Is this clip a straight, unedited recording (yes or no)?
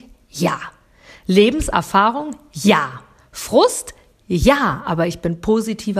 yes